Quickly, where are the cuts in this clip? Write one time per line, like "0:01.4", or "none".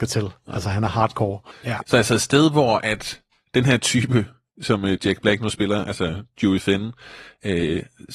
0:01.5